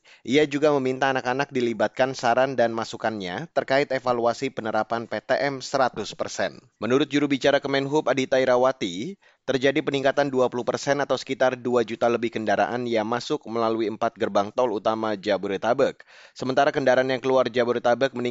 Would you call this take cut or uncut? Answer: cut